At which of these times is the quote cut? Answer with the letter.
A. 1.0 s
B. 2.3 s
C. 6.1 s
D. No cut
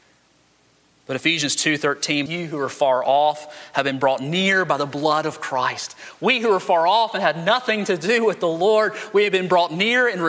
B